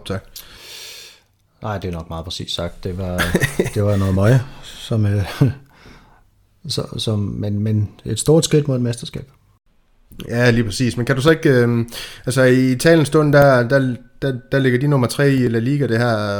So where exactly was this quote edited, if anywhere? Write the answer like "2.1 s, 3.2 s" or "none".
none